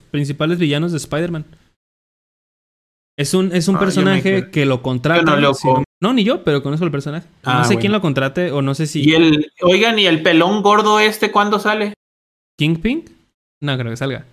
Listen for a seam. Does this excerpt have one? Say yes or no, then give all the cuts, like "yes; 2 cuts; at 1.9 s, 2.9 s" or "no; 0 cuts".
yes; 2 cuts; at 5.8 s, 7.4 s